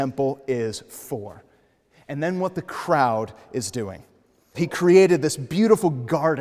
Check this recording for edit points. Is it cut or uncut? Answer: cut